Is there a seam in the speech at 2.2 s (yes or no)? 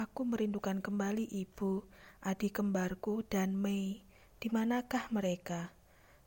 no